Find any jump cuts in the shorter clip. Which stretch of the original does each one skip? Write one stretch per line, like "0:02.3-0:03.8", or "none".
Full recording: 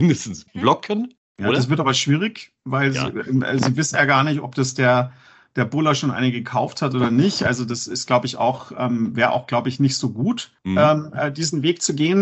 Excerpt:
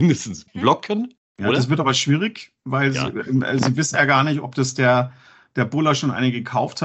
none